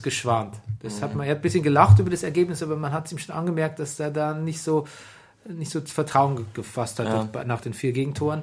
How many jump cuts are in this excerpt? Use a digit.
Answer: 0